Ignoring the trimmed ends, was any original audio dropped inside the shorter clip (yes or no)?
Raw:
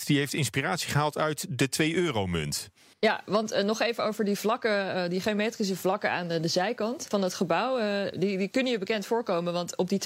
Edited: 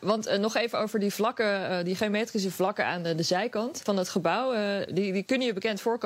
no